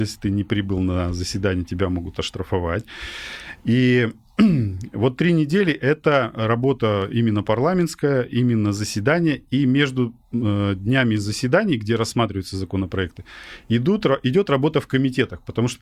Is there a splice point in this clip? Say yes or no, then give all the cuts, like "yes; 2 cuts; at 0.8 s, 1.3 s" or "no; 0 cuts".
no; 0 cuts